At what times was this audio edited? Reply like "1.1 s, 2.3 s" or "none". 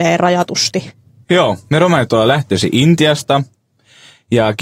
1.2 s